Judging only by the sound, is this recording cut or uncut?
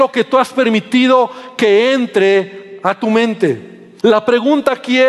cut